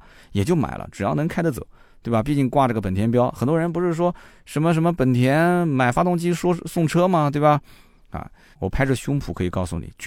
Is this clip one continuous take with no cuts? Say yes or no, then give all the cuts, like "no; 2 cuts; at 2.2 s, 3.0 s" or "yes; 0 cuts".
no; 1 cut; at 8.5 s